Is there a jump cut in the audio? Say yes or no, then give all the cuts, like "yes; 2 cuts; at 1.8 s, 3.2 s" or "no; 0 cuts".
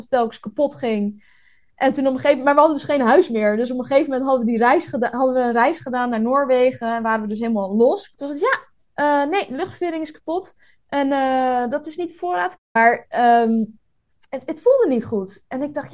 yes; 3 cuts; at 8.1 s, 12.5 s, 14.2 s